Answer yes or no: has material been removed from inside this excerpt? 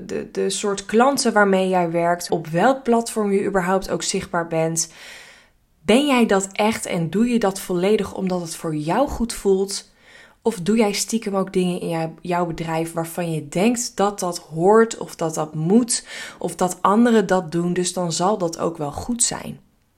yes